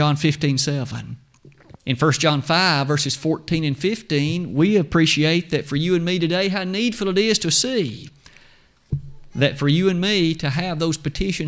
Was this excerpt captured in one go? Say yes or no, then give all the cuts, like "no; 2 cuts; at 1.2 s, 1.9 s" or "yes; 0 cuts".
no; 1 cut; at 1.8 s